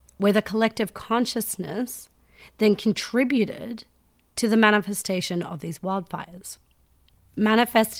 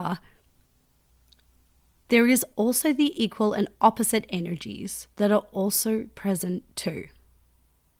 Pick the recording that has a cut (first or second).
second